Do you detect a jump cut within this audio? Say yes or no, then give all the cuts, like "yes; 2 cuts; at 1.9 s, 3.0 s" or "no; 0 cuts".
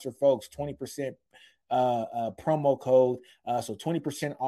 no; 0 cuts